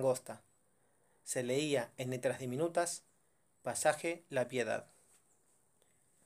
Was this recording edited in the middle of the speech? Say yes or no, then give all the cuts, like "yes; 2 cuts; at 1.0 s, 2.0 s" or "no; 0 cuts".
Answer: no; 0 cuts